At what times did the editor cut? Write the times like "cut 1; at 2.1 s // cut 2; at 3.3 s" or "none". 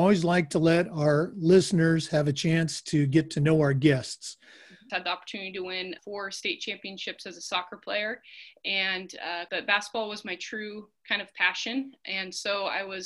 cut 1; at 4.9 s // cut 2; at 6.0 s // cut 3; at 9.5 s